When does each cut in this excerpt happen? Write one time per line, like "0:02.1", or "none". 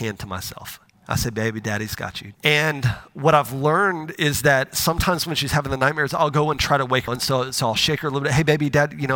0:02.3
0:07.1

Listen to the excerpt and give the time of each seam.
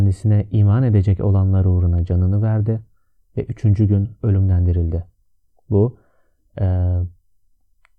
none

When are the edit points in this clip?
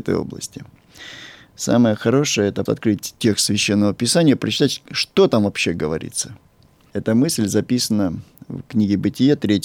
0:02.7

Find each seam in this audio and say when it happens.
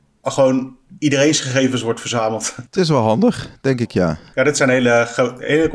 0:02.7
0:04.3

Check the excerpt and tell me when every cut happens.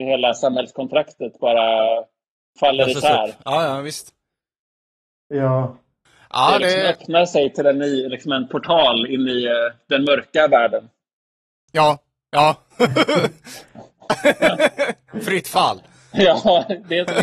none

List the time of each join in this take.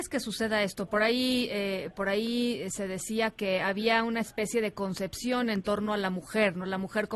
none

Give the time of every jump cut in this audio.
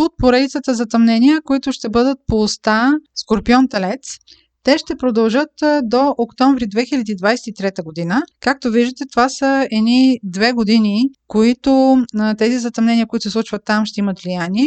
none

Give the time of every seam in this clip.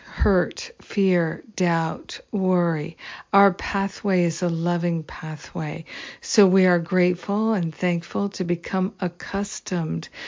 none

